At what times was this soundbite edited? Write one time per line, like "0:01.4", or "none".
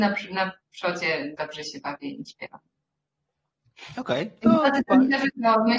none